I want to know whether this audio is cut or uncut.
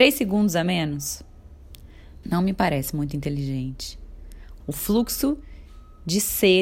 cut